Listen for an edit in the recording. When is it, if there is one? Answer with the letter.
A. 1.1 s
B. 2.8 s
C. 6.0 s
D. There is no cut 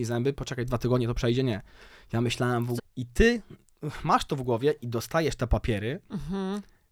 B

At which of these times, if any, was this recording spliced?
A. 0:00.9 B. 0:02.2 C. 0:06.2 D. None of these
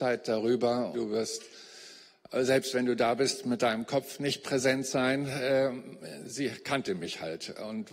A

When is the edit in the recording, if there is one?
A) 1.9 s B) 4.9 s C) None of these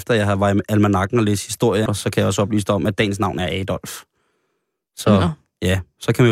A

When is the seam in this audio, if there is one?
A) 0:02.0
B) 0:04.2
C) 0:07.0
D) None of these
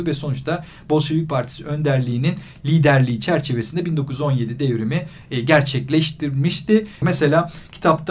C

